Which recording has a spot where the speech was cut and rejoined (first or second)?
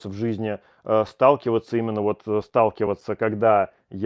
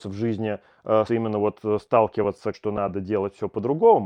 second